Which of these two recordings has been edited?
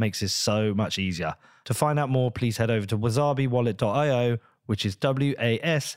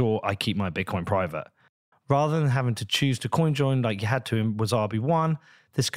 second; 1 cut; at 1.9 s

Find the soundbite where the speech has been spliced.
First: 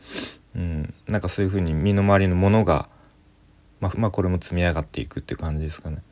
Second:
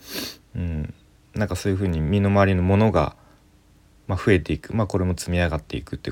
first; 2 cuts; at 1.0 s, 3.9 s

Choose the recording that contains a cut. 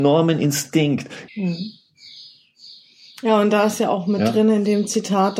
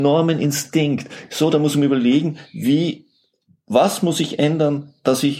first; 1 cut; at 1.3 s

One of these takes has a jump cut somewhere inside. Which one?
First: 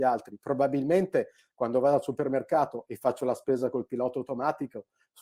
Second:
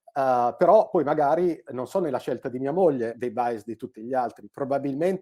second; 1 cut; at 3.1 s

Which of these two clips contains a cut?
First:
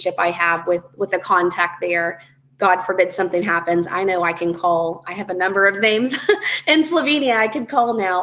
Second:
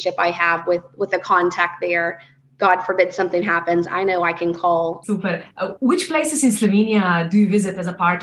second; 1 cut; at 5.0 s

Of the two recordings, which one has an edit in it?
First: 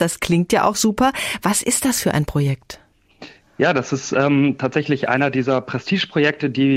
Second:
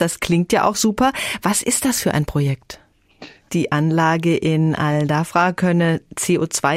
second; 1 cut; at 3.5 s

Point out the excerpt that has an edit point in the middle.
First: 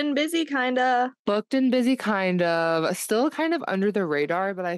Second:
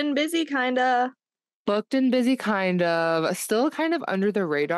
first; 1 cut; at 1.2 s

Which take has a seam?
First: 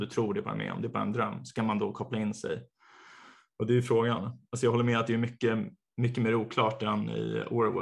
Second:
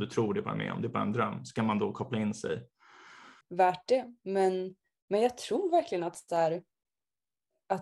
second; 1 cut; at 3.4 s

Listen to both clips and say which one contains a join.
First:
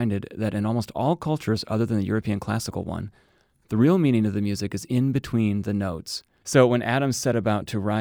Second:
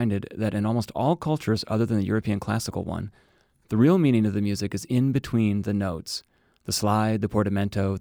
first; 1 cut; at 6.4 s

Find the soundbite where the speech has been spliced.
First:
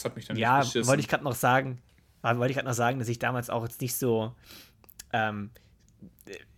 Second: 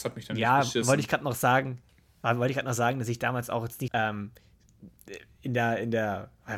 second; 1 cut; at 3.9 s

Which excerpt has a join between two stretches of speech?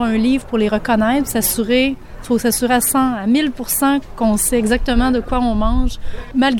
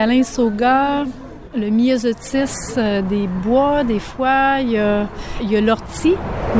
first; 1 cut; at 2.2 s

